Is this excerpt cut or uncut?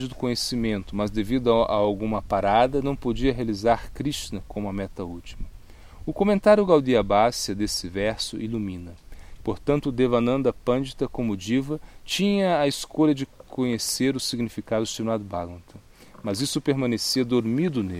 cut